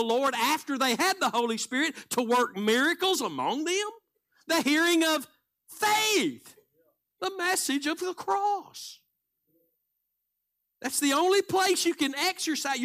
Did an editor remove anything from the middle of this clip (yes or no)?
no